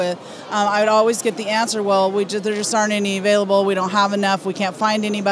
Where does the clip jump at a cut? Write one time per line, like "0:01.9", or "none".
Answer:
none